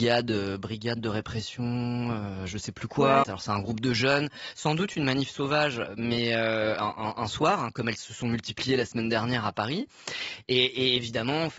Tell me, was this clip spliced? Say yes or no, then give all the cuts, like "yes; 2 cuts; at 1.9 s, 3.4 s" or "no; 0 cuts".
yes; 1 cut; at 3.2 s